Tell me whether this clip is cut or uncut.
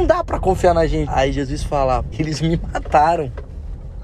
cut